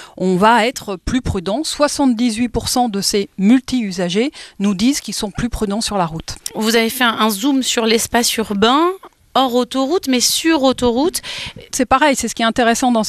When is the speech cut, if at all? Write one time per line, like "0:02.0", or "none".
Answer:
0:11.7